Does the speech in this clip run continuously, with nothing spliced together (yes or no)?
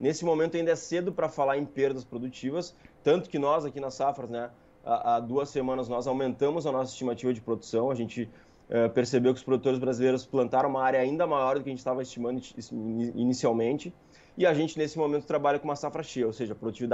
yes